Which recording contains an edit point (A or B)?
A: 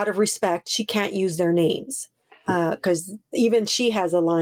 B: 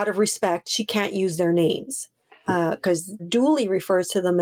B